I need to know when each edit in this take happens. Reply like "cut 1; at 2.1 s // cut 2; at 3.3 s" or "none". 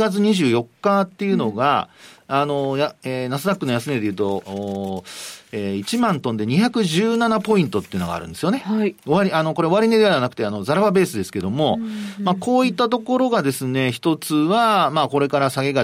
none